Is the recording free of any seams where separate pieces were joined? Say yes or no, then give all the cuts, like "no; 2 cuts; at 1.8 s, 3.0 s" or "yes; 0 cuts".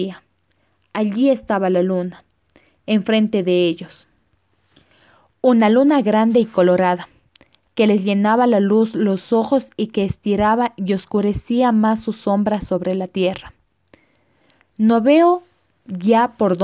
yes; 0 cuts